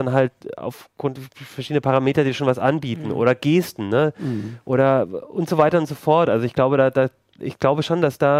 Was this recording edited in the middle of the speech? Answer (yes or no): no